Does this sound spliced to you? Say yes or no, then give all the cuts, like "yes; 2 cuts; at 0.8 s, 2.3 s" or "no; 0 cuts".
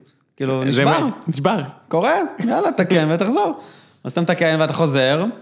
no; 0 cuts